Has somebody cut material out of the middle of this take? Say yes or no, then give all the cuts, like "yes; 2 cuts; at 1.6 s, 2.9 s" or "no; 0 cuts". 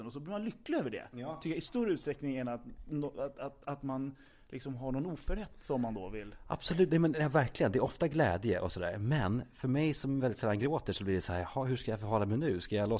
no; 0 cuts